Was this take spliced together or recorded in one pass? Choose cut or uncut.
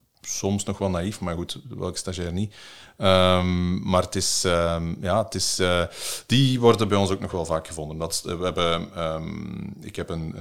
uncut